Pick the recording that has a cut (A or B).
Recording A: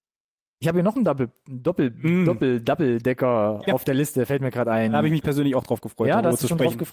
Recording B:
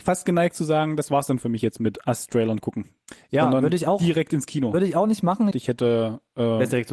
B